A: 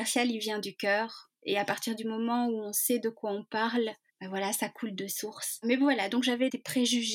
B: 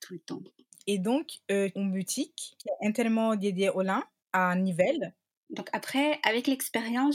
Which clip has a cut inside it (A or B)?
B